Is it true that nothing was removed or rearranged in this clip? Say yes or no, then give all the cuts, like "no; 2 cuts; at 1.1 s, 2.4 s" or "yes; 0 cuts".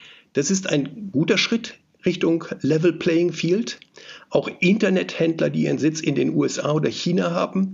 yes; 0 cuts